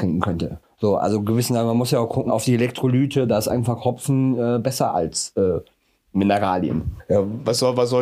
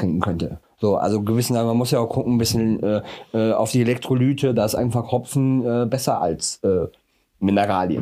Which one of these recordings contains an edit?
first; 1 cut; at 2.3 s

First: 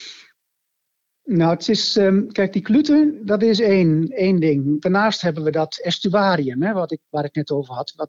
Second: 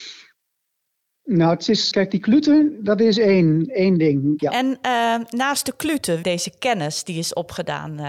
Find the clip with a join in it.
second; 3 cuts; at 1.9 s, 4.4 s, 6.2 s

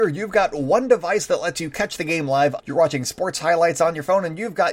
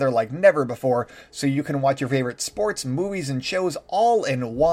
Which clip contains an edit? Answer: first; 1 cut; at 2.6 s

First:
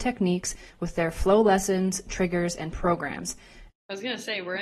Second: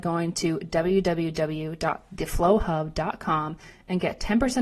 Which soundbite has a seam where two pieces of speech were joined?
first; 1 cut; at 3.7 s

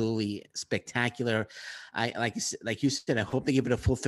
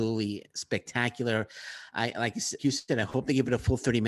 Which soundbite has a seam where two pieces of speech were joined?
second; 1 cut; at 2.6 s

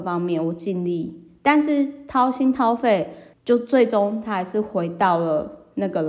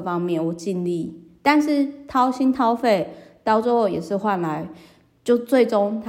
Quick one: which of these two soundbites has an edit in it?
first; 1 cut; at 3.3 s

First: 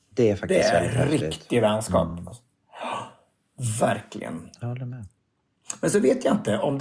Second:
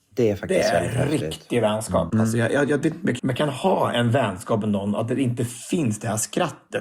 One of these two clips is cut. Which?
second; 2 cuts; at 2.1 s, 3.2 s

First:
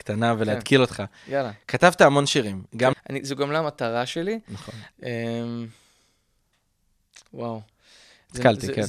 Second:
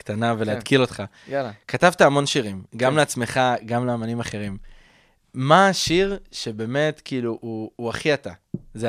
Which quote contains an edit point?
first; 2 cuts; at 2.9 s, 4.9 s

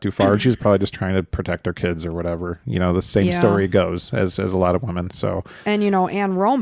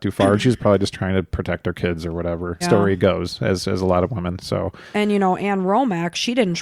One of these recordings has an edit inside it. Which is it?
second; 1 cut; at 2.6 s

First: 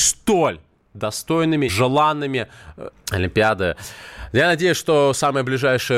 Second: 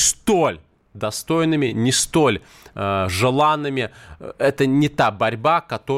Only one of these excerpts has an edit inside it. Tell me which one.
first; 2 cuts; at 1.7 s, 2.9 s

